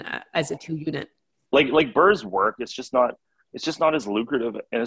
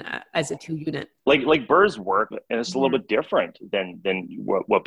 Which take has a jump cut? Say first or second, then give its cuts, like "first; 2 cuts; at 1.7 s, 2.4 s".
second; 2 cuts; at 1.2 s, 2.3 s